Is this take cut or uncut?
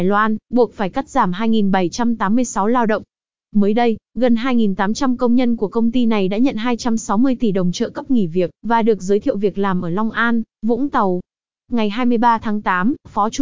uncut